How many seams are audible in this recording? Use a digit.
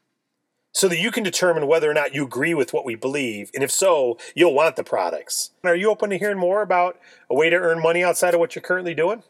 1